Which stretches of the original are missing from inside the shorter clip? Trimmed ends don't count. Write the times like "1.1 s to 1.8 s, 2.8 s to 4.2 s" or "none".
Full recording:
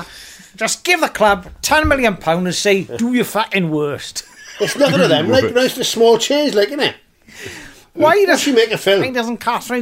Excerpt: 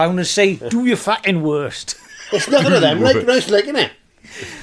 5.7 s to 6.5 s

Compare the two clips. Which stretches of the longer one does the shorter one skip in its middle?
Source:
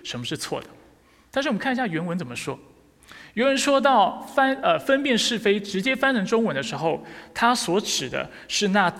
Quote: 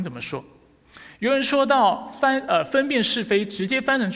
none

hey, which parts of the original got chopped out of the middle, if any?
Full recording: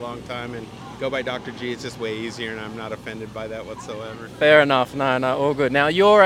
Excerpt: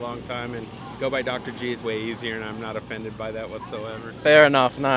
1.8 s to 1.9 s

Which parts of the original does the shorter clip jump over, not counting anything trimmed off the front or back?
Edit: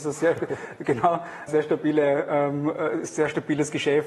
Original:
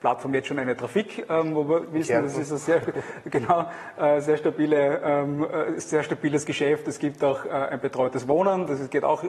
3.9 s to 4.2 s

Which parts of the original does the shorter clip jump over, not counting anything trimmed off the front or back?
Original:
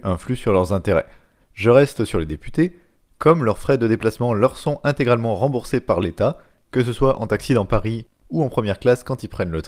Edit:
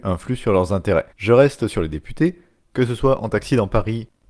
1.1 s to 1.5 s, 3.0 s to 6.6 s

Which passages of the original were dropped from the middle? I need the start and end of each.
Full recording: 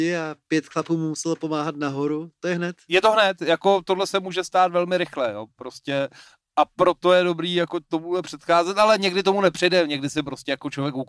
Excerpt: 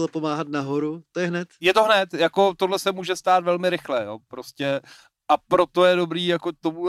none

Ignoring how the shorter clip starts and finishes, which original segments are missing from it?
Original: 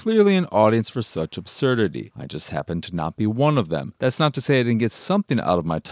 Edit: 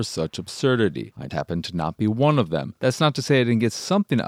2.3 s to 2.5 s

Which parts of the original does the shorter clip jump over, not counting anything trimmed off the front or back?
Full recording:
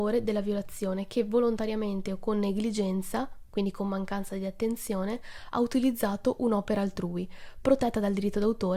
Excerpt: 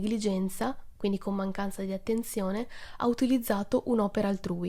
none

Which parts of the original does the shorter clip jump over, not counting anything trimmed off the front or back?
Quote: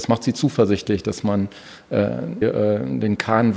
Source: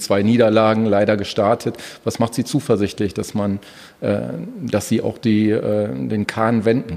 4.5 s to 5.5 s

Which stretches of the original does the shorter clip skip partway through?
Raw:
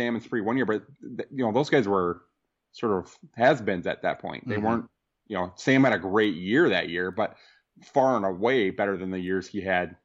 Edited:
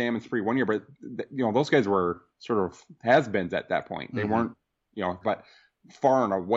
2.3 s to 2.6 s, 5.5 s to 7.1 s

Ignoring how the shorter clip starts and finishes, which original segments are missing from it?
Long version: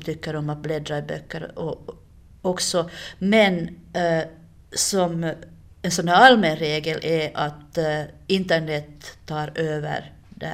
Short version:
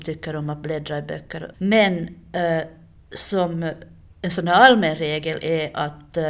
1.5 s to 3.1 s

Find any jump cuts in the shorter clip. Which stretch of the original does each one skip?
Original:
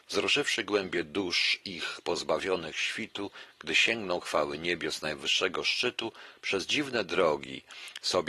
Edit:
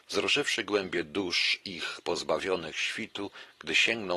none

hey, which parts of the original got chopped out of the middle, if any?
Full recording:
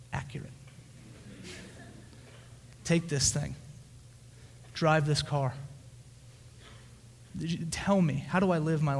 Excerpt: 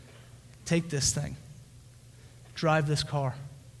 none

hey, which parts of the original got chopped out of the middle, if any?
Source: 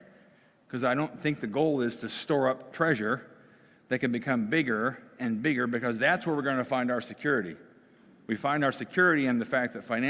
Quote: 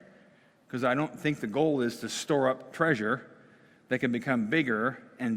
none

